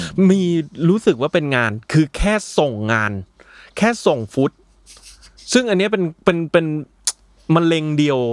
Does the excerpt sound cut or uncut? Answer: uncut